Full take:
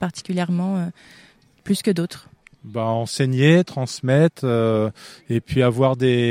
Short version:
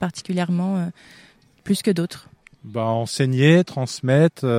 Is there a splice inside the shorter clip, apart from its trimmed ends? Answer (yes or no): no